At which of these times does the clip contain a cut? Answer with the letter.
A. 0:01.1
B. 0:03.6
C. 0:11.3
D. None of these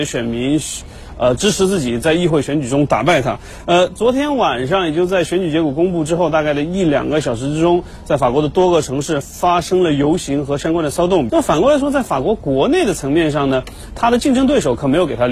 C